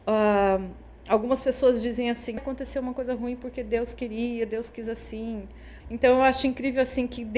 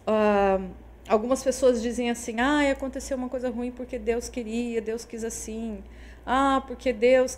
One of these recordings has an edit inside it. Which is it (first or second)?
first